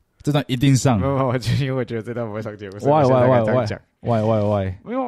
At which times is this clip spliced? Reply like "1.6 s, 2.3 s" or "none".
none